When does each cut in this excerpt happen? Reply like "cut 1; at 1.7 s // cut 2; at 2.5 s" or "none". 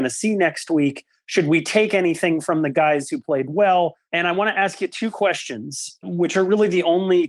cut 1; at 4.1 s // cut 2; at 6.0 s

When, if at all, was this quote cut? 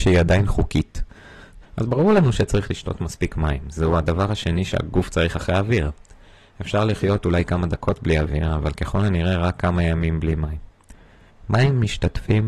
cut 1; at 1.6 s

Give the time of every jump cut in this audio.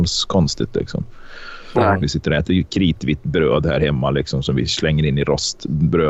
cut 1; at 2.0 s

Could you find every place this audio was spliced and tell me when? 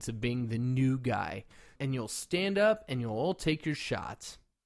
cut 1; at 1.8 s

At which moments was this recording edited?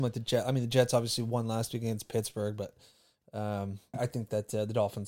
cut 1; at 3.9 s

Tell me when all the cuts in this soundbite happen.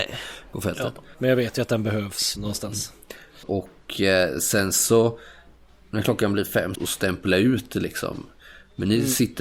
cut 1; at 1.1 s // cut 2; at 3.4 s // cut 3; at 6.7 s

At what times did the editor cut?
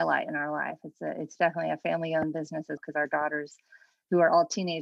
cut 1; at 2.8 s

